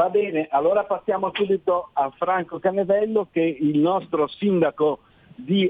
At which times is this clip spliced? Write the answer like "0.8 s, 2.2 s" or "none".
none

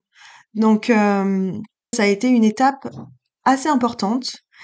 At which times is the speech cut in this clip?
1.9 s

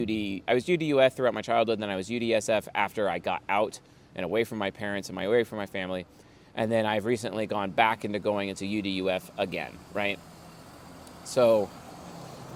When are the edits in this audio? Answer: none

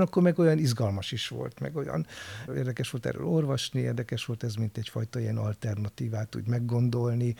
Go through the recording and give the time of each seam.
2.5 s

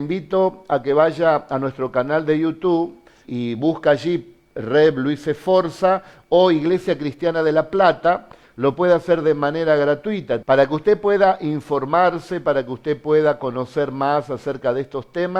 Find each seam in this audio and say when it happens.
3.2 s, 8.4 s, 10.4 s

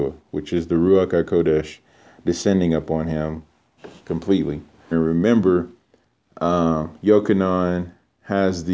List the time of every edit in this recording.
4.9 s

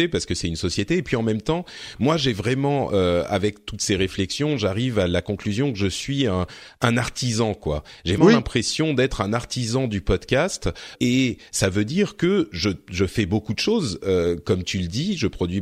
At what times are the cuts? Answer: 8.2 s, 10.9 s

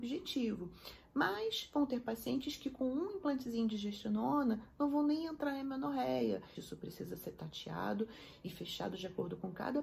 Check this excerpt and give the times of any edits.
6.5 s

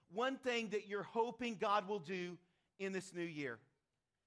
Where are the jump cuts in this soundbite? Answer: none

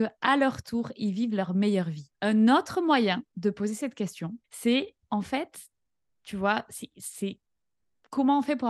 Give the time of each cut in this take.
2.1 s, 4.4 s

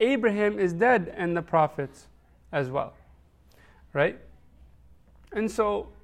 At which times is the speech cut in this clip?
none

